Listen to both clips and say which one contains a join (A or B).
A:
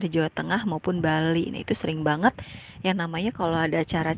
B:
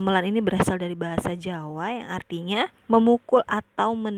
B